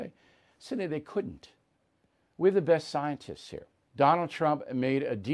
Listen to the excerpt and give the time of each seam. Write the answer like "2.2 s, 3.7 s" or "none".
3.9 s